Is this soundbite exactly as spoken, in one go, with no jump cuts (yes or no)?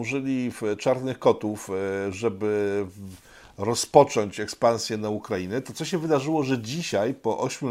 yes